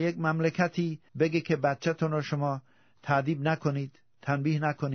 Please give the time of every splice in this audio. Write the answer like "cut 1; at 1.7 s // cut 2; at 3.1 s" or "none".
cut 1; at 1.1 s